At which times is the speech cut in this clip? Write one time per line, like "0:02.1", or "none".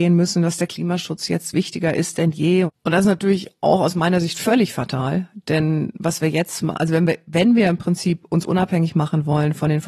0:02.7